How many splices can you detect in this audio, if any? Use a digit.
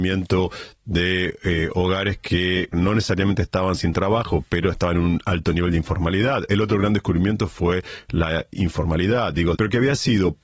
2